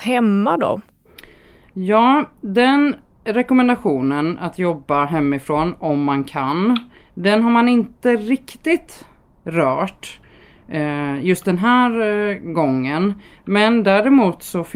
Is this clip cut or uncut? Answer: uncut